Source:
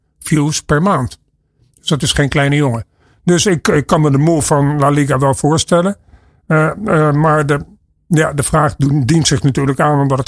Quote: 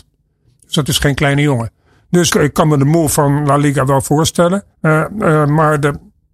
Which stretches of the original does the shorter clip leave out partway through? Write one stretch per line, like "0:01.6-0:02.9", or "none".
0:03.4-0:03.6
0:06.1-0:06.4